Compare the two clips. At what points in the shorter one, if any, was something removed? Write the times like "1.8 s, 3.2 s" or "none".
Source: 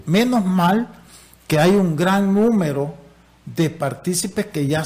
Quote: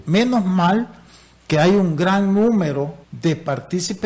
3.0 s